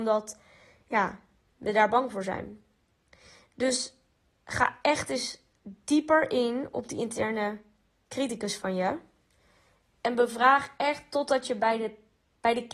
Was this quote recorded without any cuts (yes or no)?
yes